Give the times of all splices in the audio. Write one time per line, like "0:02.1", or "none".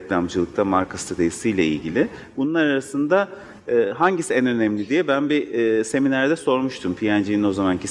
none